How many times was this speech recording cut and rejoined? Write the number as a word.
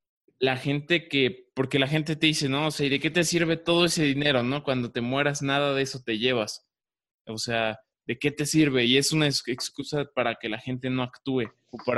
zero